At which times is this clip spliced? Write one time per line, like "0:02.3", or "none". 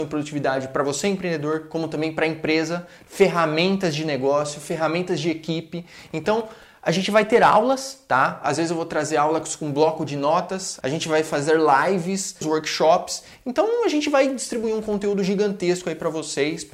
0:08.4
0:10.8
0:12.4